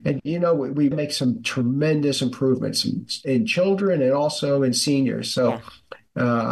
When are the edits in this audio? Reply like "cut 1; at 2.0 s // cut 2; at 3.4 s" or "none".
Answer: cut 1; at 0.9 s